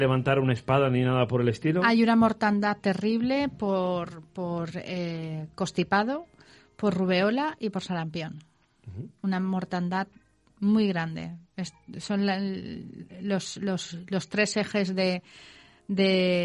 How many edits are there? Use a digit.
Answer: 0